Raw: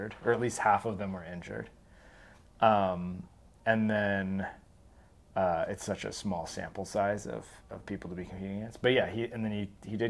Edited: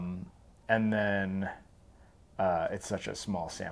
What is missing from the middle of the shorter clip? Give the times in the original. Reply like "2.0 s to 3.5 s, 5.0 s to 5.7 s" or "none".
none